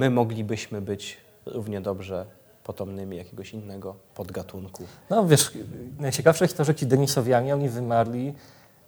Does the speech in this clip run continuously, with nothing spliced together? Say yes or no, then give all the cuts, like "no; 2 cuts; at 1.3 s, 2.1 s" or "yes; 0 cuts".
yes; 0 cuts